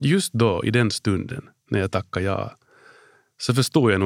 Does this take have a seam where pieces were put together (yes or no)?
no